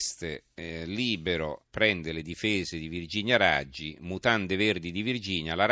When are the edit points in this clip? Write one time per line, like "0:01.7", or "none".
0:01.6